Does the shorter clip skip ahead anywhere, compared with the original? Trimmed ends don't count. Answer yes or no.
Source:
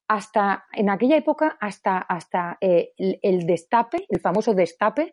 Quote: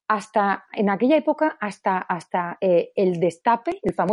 yes